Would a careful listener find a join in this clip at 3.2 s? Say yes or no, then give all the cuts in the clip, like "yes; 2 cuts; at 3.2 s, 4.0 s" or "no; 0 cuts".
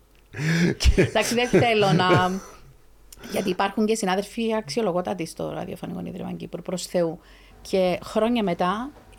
no; 1 cut; at 7.5 s